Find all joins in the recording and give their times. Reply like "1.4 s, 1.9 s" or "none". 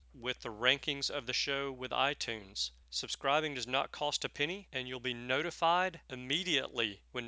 2.8 s